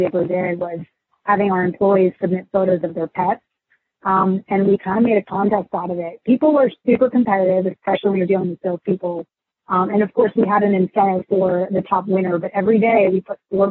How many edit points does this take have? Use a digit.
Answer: 0